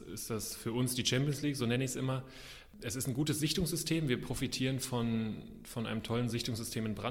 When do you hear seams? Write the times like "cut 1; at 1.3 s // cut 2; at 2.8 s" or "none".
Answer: none